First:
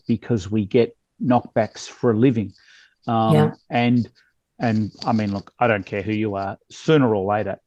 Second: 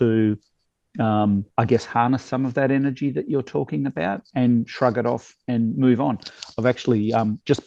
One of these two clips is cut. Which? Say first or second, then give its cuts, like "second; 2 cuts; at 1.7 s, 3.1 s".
second; 1 cut; at 1.5 s